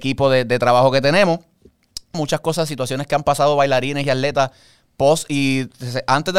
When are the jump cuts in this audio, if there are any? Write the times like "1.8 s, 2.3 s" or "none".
2.1 s

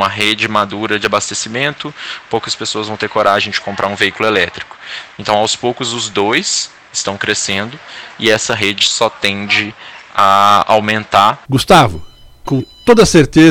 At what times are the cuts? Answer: 5.1 s, 11.4 s, 12.4 s

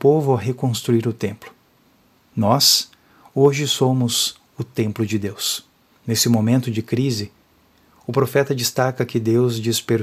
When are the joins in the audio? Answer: 2.2 s, 5.9 s

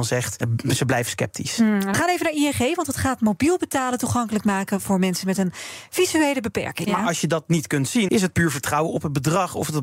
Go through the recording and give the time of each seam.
6.8 s, 8.1 s

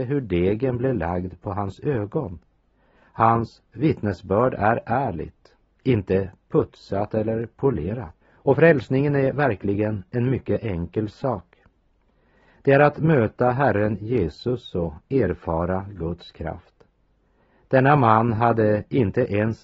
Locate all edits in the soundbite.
8.2 s

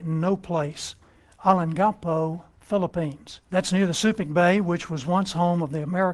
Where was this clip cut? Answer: 3.4 s

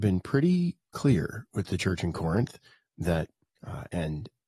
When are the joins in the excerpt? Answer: 3.5 s

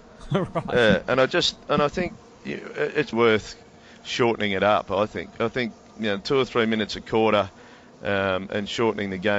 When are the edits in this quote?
3.1 s

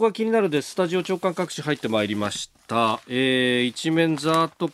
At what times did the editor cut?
none

